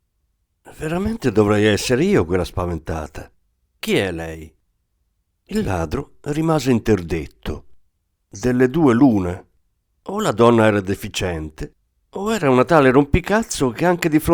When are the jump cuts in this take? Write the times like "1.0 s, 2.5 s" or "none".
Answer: 3.7 s

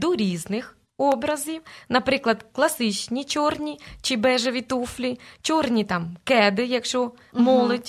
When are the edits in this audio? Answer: none

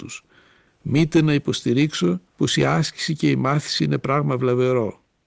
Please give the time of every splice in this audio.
2.3 s

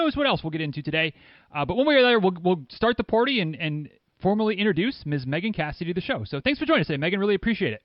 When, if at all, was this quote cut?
none

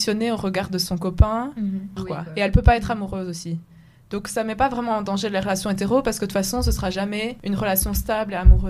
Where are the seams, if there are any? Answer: 2.0 s

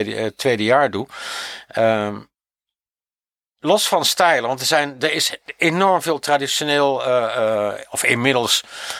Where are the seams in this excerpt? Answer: none

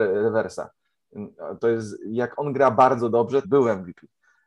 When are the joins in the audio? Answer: 1.6 s, 3.4 s

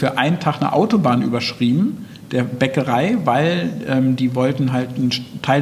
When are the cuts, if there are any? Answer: none

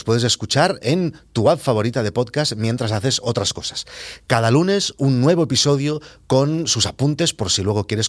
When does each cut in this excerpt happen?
none

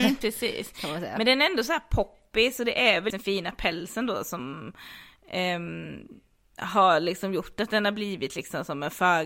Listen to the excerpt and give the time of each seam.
3.1 s

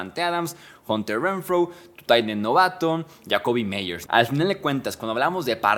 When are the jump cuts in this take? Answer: 4.1 s

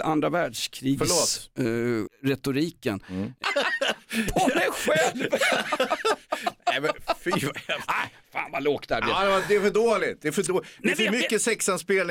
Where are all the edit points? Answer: 2.1 s, 3.4 s

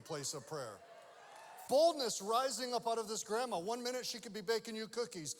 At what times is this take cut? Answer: 1.7 s

